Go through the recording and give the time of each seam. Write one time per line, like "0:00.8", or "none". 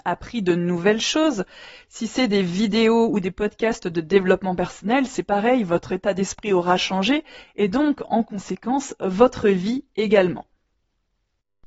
0:01.7